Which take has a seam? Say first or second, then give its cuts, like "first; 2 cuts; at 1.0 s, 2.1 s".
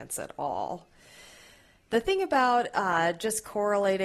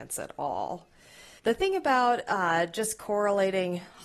second; 1 cut; at 1.4 s